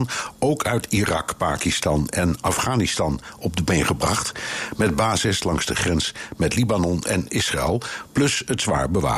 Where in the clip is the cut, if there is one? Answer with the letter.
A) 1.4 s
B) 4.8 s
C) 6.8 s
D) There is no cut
D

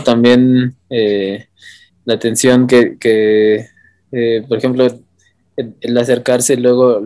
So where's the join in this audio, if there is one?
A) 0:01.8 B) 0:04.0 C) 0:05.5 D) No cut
D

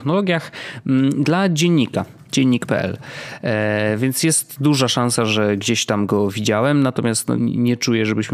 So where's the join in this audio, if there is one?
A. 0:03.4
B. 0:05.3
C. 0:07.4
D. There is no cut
C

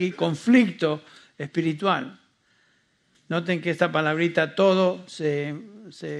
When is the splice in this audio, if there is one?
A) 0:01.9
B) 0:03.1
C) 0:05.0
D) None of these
B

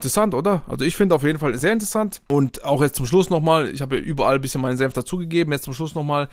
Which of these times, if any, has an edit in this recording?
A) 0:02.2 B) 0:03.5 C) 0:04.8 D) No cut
D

